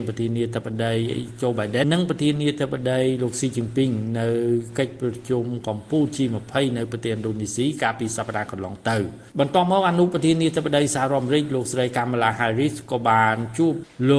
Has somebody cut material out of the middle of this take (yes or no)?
yes